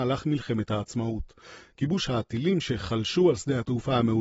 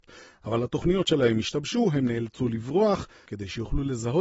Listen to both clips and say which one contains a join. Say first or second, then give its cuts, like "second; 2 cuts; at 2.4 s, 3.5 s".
second; 1 cut; at 3.3 s